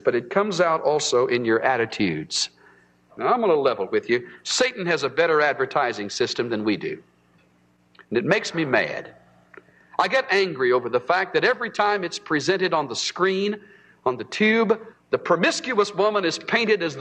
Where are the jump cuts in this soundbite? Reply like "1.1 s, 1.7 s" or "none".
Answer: 14.9 s